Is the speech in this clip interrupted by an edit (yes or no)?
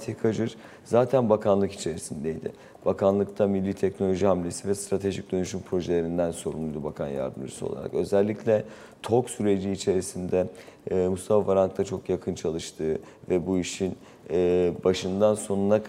no